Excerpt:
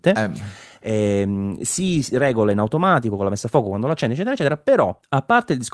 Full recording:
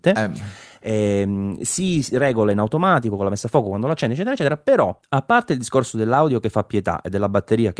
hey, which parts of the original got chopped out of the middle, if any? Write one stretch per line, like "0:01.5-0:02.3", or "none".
none